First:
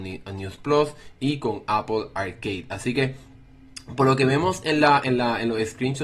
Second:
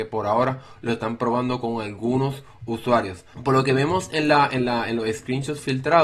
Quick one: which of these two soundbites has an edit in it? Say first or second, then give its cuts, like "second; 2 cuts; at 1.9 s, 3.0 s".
second; 1 cut; at 3.3 s